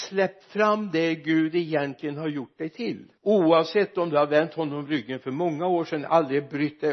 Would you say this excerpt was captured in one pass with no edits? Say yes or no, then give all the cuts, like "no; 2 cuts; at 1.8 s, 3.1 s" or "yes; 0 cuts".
no; 1 cut; at 3.2 s